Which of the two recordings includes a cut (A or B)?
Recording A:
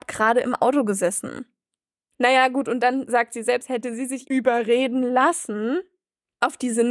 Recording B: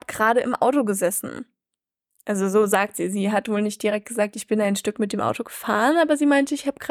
A